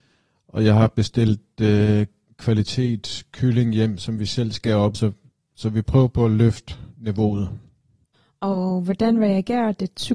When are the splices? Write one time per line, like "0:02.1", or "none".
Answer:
0:04.9